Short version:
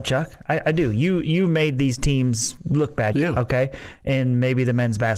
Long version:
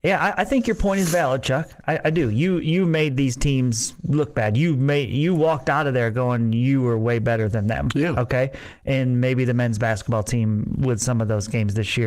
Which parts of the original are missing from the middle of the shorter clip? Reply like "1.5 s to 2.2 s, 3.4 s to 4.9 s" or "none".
4.5 s to 7.9 s

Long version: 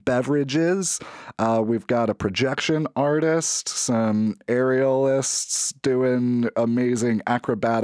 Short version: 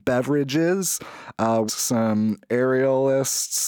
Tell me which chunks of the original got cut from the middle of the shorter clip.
1.7 s to 3.6 s

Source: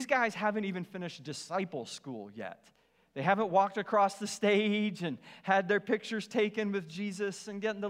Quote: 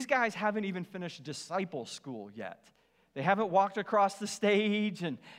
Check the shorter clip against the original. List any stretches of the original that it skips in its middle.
none

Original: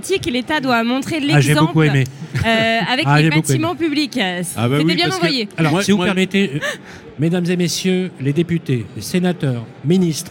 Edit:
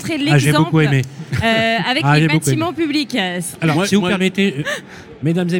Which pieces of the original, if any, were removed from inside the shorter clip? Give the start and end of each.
4.5 s to 5.5 s

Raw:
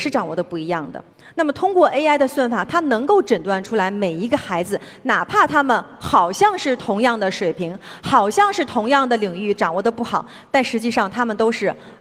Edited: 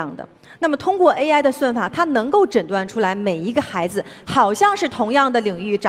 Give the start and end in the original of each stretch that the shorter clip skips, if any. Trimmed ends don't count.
5.0 s to 8.0 s

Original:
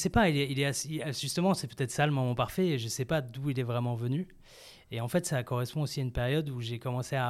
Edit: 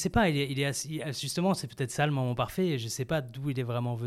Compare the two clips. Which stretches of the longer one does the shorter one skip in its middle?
none

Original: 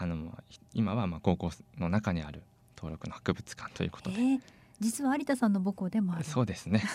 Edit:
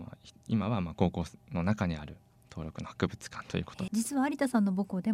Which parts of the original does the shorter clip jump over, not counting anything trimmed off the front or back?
4.1 s to 4.8 s

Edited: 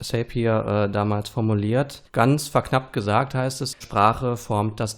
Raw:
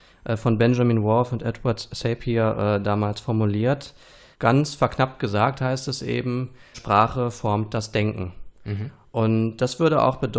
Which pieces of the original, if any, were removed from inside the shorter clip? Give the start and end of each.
4.0 s to 4.3 s, 6.0 s to 6.7 s

